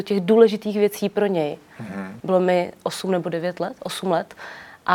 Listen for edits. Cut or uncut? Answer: cut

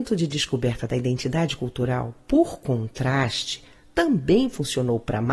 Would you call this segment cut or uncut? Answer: uncut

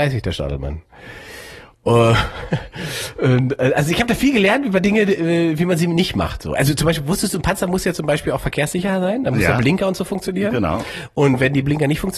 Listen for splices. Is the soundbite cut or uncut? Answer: uncut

